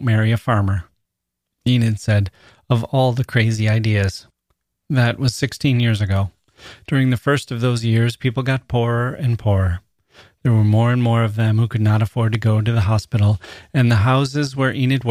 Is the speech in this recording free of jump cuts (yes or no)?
yes